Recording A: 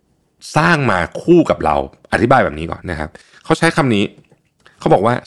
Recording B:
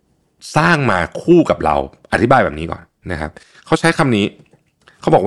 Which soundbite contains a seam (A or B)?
A